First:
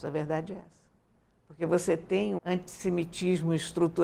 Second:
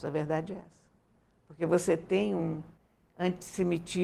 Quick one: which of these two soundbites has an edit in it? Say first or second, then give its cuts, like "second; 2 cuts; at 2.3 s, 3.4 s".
first; 1 cut; at 2.4 s